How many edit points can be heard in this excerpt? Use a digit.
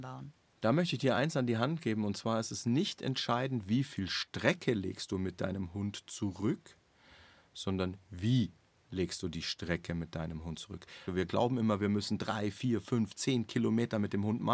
1